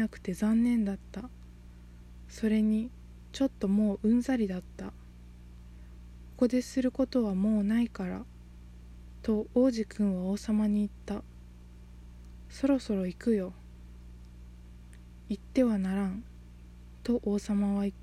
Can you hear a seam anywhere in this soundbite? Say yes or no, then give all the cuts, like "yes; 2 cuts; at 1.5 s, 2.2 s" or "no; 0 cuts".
yes; 1 cut; at 6.3 s